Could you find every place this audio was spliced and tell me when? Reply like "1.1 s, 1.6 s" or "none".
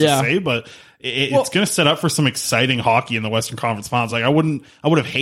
4.1 s